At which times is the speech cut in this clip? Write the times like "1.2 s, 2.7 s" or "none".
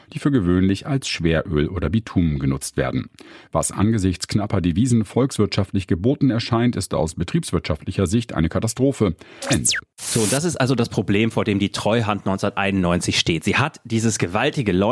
9.4 s